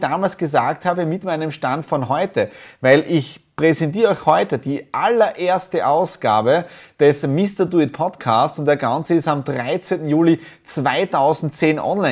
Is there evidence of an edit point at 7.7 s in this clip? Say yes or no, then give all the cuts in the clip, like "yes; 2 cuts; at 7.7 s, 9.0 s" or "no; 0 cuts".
no; 0 cuts